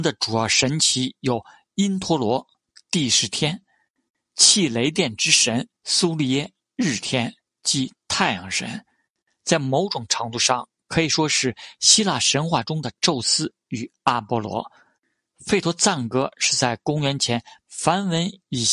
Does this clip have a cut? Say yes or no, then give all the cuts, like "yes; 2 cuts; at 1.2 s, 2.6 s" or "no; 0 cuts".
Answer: yes; 3 cuts; at 5.7 s, 15.3 s, 17.6 s